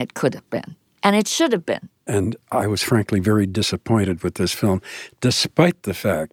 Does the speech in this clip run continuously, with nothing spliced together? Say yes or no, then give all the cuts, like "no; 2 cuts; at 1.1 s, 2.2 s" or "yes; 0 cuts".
no; 1 cut; at 2.1 s